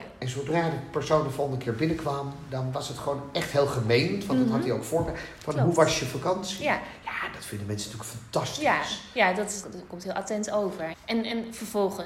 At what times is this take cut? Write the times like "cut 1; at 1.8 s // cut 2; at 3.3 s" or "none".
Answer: cut 1; at 9.6 s // cut 2; at 10.9 s